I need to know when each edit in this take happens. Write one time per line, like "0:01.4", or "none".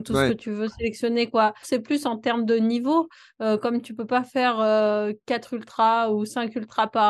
0:01.6